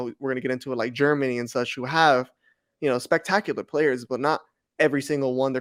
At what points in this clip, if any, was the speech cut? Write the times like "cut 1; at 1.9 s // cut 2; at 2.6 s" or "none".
none